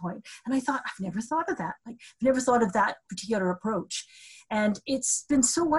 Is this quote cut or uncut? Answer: uncut